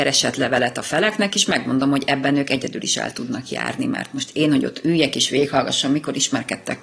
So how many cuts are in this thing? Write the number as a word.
zero